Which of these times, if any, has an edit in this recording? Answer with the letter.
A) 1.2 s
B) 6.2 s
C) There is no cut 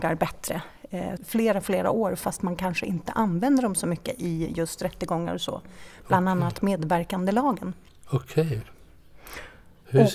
A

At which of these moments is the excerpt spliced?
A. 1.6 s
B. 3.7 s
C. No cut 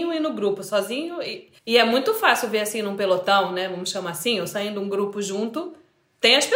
A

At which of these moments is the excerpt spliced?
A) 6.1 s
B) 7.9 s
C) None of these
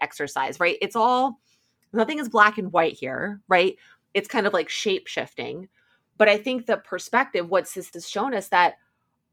B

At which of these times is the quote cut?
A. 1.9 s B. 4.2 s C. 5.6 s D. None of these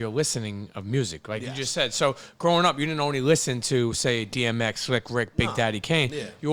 D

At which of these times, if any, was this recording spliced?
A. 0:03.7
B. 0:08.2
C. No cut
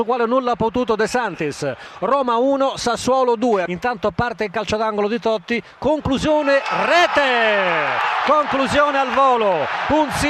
B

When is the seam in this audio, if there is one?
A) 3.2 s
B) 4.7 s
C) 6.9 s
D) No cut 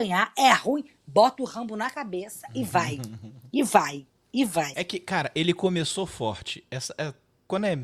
B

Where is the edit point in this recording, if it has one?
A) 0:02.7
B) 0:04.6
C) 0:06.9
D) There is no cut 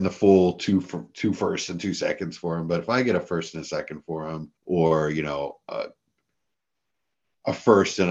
B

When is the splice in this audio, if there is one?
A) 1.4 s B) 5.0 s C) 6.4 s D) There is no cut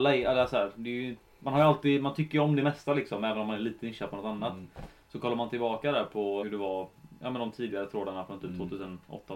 C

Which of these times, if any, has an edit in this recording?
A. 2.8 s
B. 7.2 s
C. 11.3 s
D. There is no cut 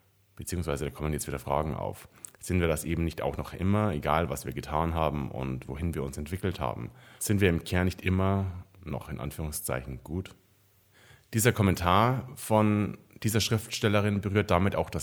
B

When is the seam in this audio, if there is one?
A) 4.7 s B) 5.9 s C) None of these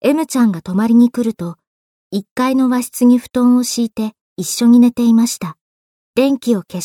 B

